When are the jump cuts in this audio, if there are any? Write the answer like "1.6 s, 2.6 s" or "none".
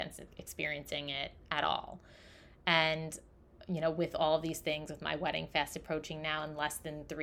none